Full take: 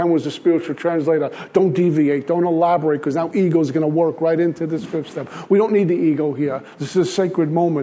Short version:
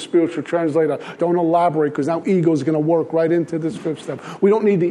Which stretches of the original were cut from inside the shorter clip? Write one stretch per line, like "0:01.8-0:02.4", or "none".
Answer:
0:01.5-0:02.2